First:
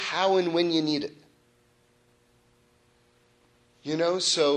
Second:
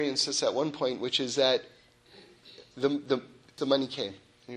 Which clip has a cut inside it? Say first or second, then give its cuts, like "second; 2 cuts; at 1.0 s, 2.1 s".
second; 1 cut; at 3.6 s